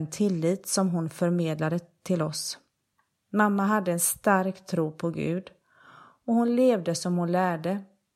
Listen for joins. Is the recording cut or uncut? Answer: uncut